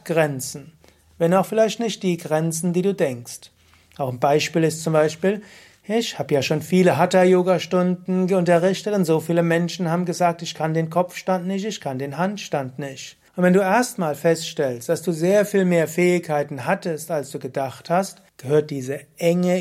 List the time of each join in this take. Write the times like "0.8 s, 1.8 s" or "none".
13.3 s, 18.3 s